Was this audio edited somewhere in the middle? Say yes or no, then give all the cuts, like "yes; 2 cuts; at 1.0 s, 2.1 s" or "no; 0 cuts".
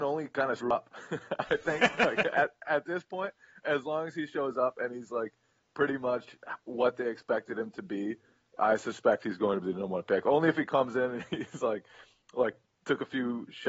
no; 0 cuts